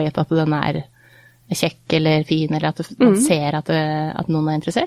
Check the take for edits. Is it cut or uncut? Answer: uncut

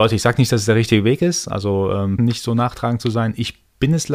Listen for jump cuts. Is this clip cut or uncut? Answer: cut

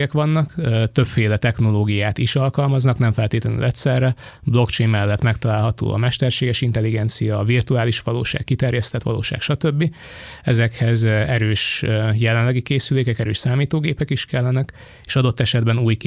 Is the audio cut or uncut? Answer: uncut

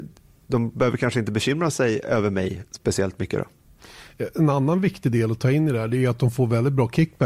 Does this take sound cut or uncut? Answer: uncut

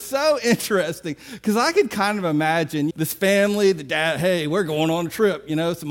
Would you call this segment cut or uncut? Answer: cut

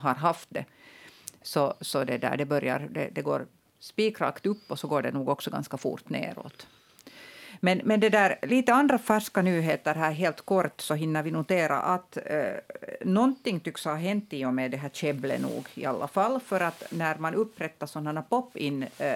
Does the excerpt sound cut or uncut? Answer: uncut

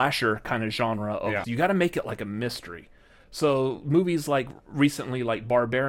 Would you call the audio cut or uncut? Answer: cut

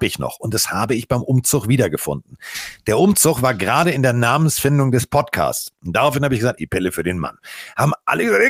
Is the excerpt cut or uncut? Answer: cut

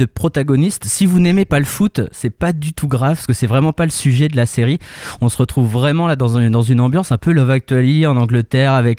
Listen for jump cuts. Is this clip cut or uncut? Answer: uncut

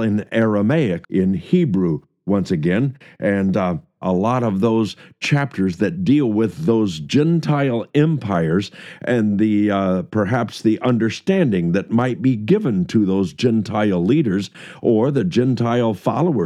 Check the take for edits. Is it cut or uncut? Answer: cut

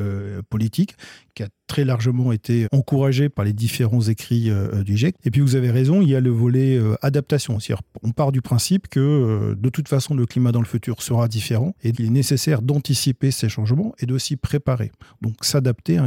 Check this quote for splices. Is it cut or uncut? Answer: cut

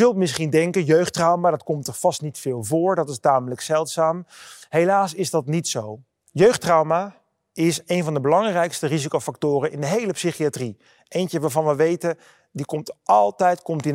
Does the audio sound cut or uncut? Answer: cut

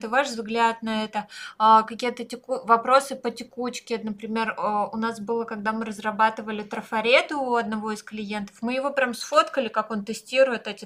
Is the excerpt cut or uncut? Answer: uncut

